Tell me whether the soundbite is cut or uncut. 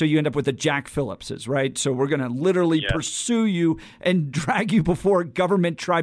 uncut